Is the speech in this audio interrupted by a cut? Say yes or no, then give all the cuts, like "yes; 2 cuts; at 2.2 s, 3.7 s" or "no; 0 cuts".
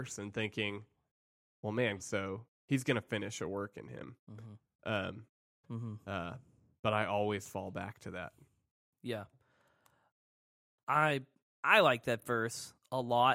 yes; 2 cuts; at 2.0 s, 5.6 s